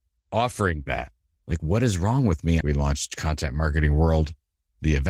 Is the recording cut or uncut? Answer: cut